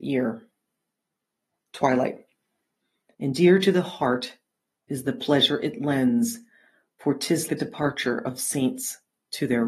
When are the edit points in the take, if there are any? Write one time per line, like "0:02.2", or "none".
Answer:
0:03.1
0:07.5